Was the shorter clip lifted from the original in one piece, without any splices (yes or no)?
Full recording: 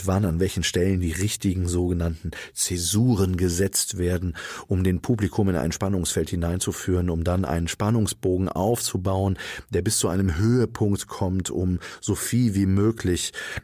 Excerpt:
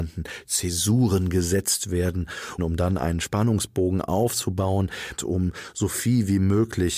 no